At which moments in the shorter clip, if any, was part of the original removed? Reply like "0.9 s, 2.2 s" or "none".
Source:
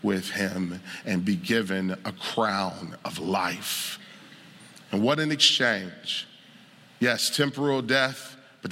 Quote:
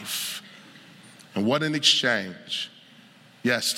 none